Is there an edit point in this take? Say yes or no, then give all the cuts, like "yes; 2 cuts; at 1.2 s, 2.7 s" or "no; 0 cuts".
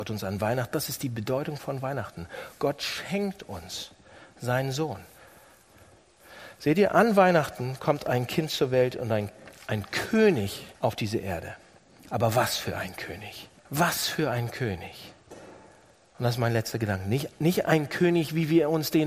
yes; 2 cuts; at 10.7 s, 13.6 s